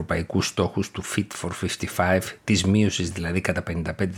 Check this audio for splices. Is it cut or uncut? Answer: uncut